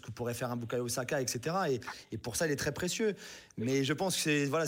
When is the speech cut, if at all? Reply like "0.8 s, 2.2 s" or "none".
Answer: none